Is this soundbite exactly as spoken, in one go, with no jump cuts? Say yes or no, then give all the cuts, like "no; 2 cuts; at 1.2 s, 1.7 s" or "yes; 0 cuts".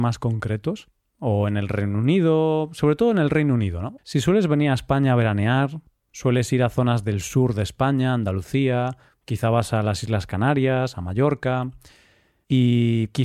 no; 1 cut; at 4.0 s